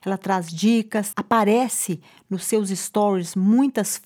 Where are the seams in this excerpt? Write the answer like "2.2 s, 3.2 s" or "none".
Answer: 1.1 s